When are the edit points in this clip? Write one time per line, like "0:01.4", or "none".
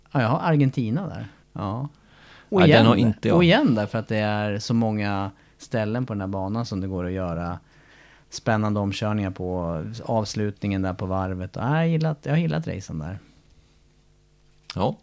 0:01.4